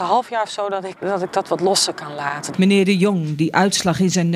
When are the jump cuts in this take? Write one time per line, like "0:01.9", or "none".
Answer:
0:01.0
0:02.5